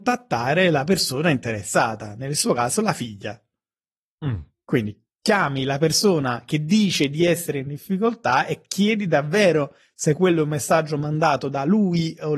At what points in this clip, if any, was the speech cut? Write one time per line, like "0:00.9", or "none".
none